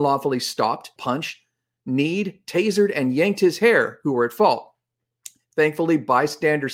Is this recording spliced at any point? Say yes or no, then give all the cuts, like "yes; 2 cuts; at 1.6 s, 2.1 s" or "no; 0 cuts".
yes; 1 cut; at 1.0 s